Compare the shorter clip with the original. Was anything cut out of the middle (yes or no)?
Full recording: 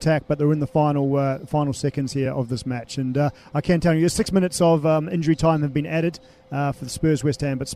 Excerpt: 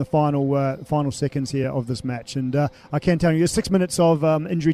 no